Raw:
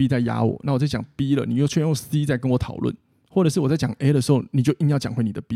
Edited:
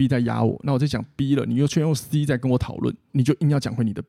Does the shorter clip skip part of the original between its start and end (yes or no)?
yes